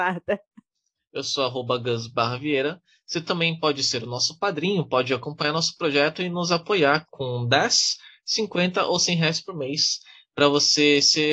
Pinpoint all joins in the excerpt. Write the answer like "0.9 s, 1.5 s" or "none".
1.0 s, 7.1 s